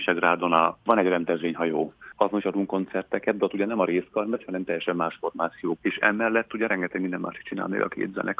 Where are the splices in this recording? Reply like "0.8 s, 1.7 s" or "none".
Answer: 5.8 s